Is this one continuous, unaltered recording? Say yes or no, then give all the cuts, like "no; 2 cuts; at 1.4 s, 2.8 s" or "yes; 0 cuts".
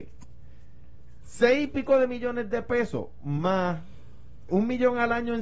no; 1 cut; at 4.5 s